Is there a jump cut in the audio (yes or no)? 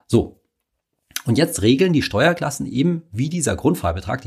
no